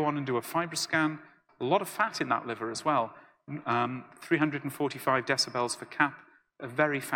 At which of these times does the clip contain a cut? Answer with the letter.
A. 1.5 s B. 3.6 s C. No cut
A